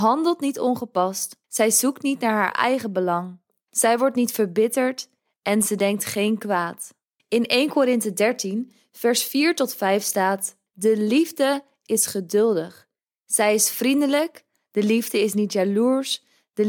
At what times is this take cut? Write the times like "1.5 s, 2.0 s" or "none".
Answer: 1.4 s, 7.2 s, 10.7 s